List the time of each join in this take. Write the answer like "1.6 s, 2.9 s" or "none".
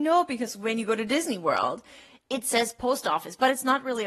none

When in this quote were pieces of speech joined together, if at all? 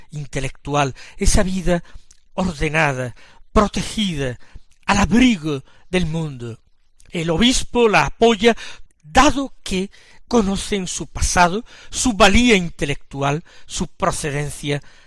7.1 s, 8.9 s

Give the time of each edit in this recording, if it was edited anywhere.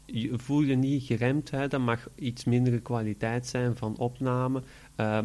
none

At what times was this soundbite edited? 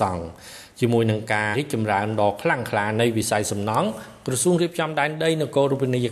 1.5 s

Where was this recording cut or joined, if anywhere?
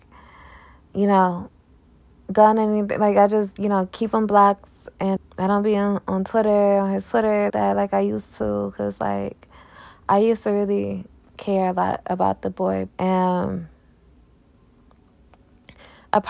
5.2 s, 7.5 s, 12.9 s

